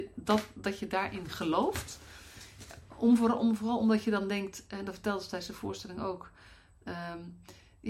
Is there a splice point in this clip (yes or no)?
no